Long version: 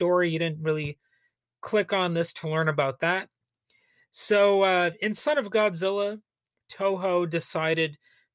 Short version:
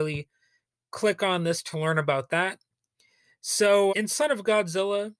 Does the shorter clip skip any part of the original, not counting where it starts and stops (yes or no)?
yes